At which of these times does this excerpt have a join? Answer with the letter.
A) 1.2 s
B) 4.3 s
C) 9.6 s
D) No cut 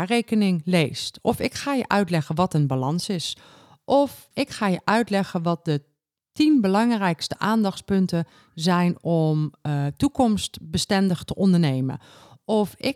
B